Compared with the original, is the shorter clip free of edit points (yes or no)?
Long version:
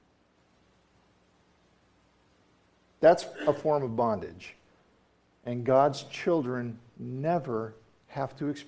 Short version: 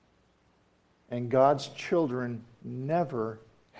no